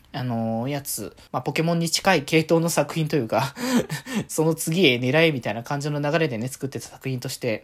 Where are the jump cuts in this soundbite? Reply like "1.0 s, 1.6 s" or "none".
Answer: 1.3 s